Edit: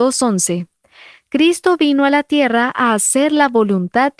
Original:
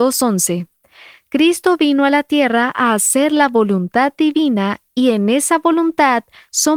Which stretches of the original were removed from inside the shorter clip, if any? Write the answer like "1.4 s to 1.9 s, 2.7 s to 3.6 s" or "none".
none